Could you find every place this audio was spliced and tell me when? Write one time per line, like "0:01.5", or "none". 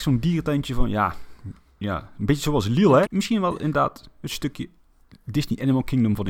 0:03.0